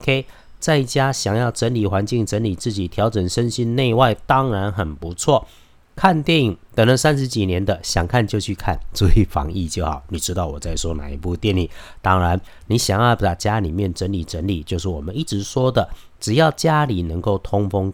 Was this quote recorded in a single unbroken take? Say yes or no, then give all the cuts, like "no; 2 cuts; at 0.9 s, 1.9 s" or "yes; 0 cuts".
yes; 0 cuts